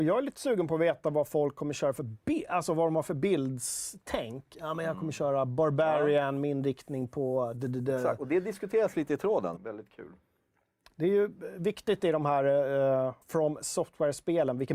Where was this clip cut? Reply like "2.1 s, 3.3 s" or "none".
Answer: 9.6 s, 13.2 s